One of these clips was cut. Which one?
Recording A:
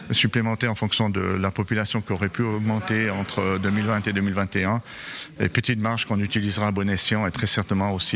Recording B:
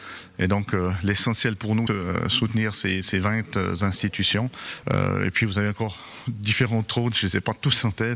B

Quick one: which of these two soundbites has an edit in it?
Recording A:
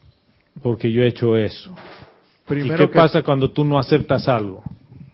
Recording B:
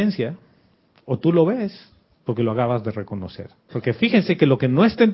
B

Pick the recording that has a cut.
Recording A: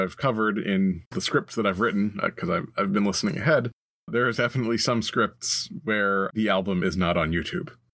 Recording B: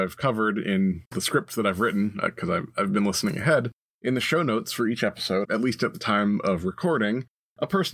B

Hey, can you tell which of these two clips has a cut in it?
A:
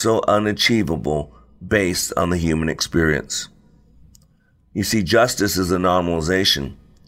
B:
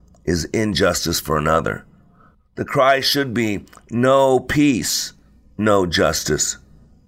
B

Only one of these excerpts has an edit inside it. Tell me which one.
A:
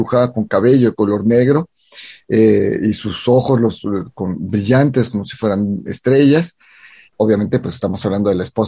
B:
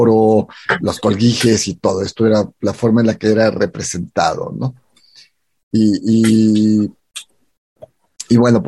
A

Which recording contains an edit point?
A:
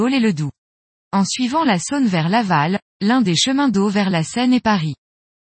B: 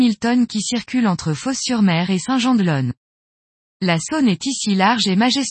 A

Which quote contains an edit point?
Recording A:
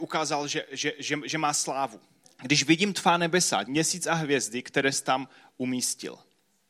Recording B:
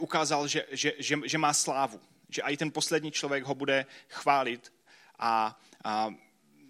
A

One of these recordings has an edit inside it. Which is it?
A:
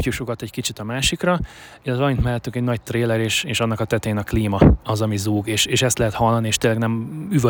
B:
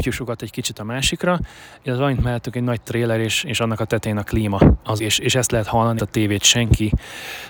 B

